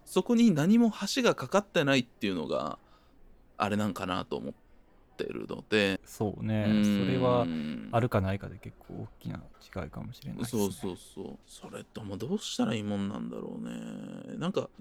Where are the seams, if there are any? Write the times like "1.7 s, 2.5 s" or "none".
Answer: 6.0 s, 11.4 s